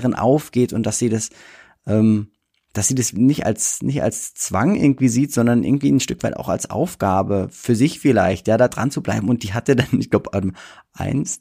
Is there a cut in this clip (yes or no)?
no